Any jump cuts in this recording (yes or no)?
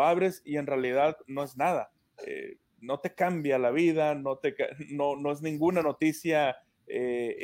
no